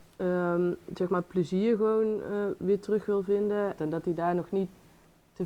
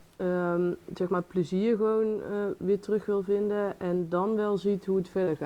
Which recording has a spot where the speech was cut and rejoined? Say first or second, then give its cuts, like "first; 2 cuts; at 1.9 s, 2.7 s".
first; 1 cut; at 3.8 s